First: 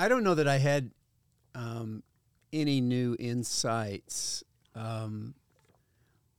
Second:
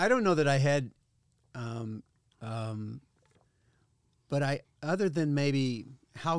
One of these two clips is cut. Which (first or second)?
second